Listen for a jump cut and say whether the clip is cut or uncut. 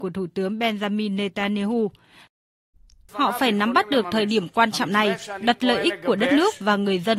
cut